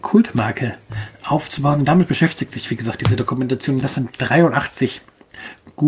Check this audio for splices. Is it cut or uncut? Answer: cut